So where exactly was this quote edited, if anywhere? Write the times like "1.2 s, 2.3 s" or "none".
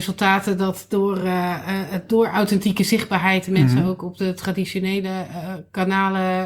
none